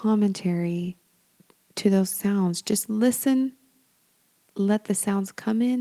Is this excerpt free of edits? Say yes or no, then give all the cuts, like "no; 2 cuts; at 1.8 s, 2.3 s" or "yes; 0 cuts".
yes; 0 cuts